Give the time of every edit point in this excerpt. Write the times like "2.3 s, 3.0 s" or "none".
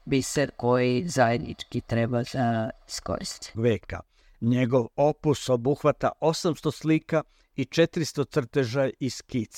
3.5 s

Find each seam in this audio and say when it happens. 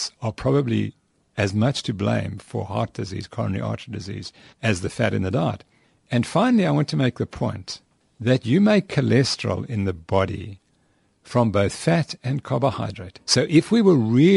13.2 s

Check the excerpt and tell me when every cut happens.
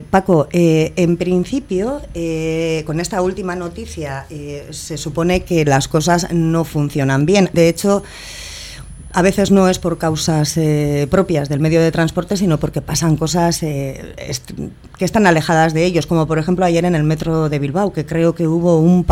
7.5 s

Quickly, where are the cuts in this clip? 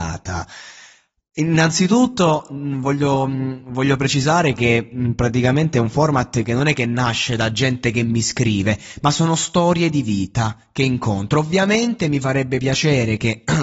none

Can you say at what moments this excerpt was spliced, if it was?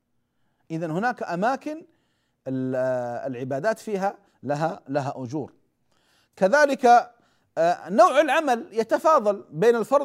none

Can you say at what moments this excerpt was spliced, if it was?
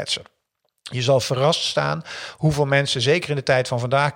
none

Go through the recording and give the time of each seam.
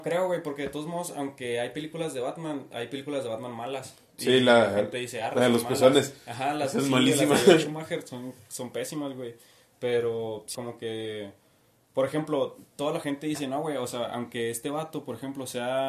10.5 s

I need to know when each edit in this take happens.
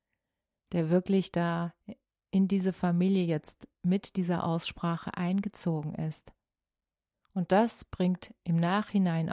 7.1 s

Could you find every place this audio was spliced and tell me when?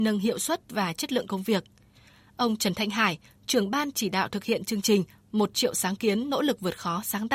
3.4 s

